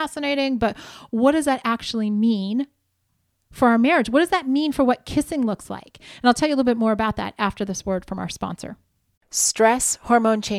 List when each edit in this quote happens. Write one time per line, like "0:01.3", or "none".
none